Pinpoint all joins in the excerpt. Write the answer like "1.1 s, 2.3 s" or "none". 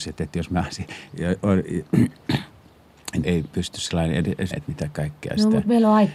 3.2 s, 4.5 s

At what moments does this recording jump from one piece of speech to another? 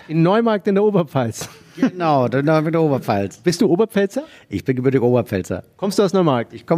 none

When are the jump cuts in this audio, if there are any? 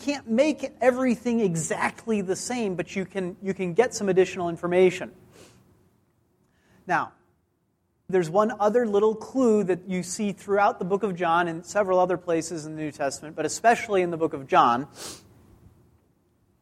8.1 s

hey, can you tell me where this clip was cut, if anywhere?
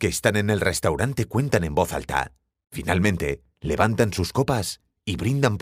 2.6 s

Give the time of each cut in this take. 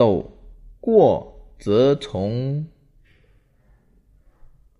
none

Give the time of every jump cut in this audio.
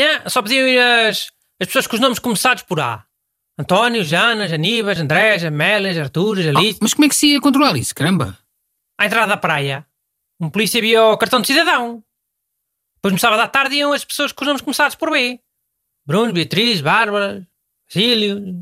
5.0 s

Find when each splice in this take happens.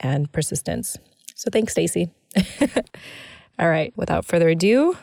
3.9 s

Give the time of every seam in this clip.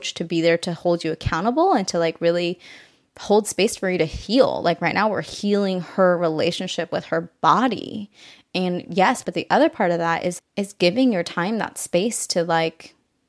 9.2 s, 10.4 s

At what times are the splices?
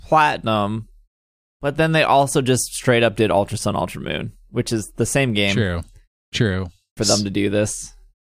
7.0 s

